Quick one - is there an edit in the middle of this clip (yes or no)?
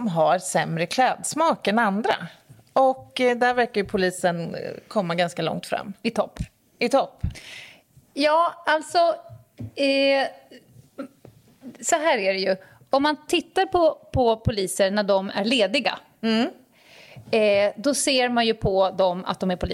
no